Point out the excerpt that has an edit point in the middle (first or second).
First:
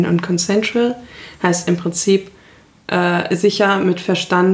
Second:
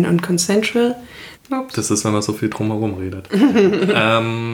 second